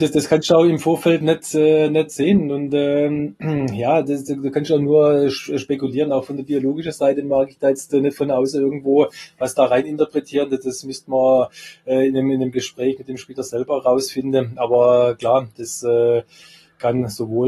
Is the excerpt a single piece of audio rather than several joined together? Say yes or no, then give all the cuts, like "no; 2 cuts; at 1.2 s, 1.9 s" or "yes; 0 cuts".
yes; 0 cuts